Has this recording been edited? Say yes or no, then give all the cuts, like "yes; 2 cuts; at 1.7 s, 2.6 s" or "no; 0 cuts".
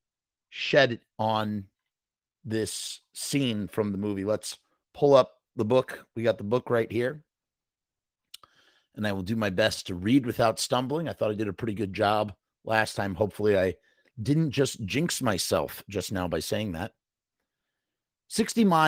no; 0 cuts